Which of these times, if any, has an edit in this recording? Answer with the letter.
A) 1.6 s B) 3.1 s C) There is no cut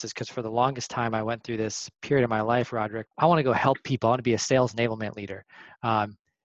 B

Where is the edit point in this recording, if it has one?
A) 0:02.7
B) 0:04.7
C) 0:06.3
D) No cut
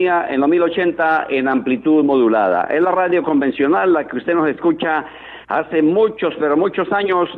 D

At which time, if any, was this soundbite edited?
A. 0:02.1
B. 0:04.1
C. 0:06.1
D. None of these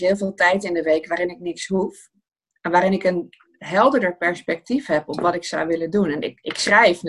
D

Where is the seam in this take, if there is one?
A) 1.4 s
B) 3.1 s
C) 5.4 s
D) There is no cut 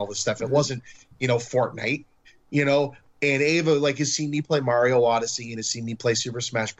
B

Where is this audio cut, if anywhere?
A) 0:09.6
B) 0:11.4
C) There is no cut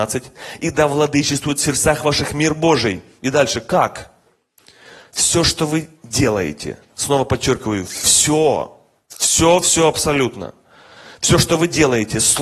A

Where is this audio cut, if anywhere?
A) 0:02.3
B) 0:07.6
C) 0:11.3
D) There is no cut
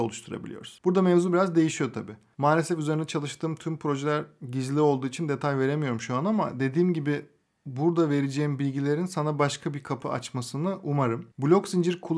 A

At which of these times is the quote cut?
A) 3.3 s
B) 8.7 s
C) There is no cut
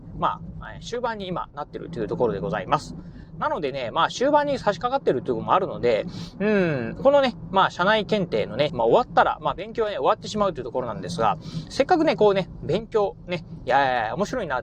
B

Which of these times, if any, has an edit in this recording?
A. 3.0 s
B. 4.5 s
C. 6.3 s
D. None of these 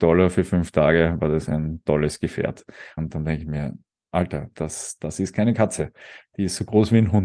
A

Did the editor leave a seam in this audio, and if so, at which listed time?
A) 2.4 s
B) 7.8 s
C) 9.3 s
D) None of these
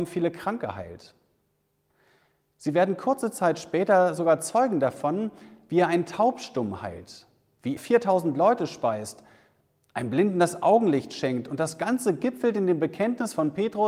B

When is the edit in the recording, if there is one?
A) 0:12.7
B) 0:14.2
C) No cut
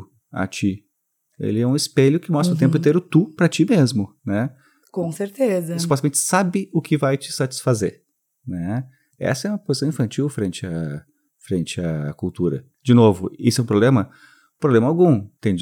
C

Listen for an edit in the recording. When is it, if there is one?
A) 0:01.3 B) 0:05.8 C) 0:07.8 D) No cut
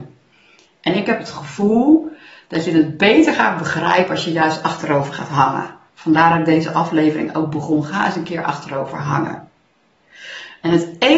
D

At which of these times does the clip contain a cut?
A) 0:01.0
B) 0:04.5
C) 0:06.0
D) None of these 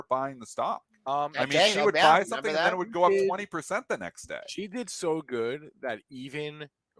D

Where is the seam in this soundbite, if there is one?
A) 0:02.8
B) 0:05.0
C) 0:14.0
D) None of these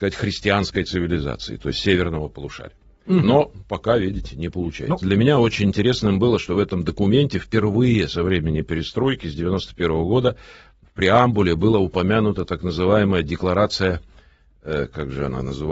B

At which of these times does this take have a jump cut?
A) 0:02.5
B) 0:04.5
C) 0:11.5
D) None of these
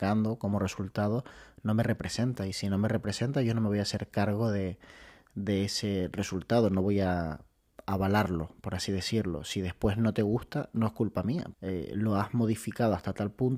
C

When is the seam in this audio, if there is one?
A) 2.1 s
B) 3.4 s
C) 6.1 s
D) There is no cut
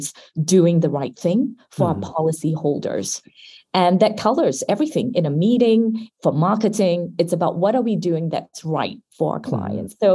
C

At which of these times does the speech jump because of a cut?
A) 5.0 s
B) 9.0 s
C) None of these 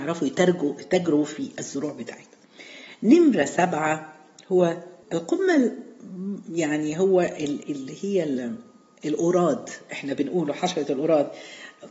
A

